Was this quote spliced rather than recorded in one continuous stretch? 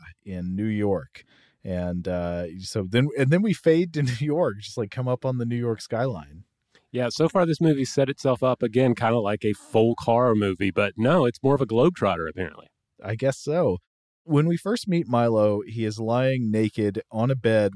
no; 0 cuts

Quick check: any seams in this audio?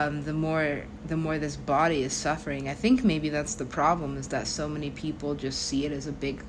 no; 0 cuts

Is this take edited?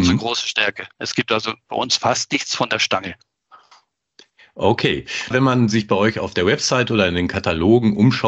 yes; 1 cut; at 5.3 s

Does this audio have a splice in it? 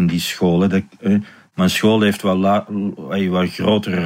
no; 0 cuts

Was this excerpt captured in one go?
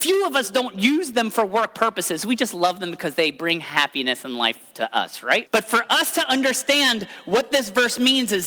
no; 1 cut; at 5.5 s

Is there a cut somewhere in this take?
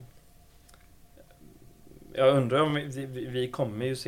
no; 0 cuts

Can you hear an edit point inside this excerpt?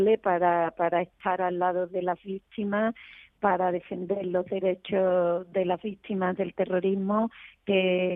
no; 0 cuts

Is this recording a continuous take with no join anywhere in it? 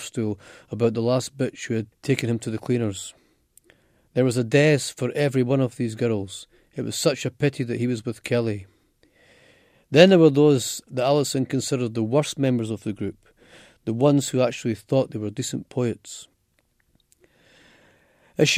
yes; 0 cuts

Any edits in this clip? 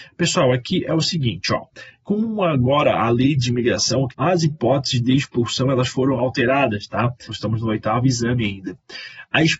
yes; 2 cuts; at 4.1 s, 7.3 s

